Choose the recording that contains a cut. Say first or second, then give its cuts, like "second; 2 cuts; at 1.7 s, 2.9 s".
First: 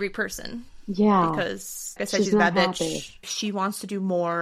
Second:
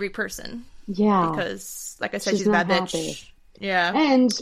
first; 2 cuts; at 2.0 s, 3.2 s